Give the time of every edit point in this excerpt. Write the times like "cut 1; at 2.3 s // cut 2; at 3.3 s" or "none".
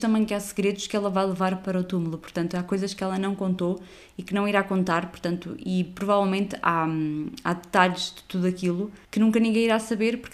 cut 1; at 9.0 s